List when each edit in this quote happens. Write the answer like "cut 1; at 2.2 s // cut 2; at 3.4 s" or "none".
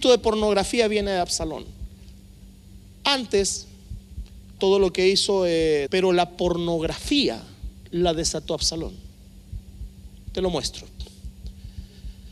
cut 1; at 4.6 s // cut 2; at 5.9 s